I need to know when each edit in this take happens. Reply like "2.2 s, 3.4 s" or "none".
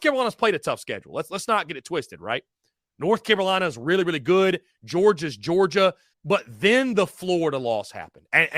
6.1 s